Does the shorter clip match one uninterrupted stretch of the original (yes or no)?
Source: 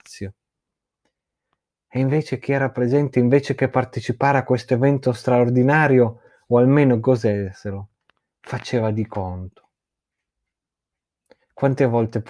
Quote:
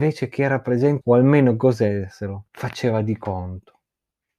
no